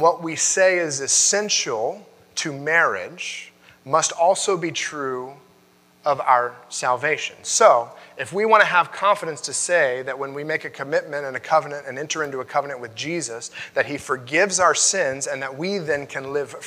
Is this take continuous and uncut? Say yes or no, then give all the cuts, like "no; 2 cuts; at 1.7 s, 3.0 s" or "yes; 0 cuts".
yes; 0 cuts